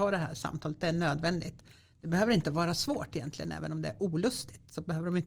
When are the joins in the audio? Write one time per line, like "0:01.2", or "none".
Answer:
none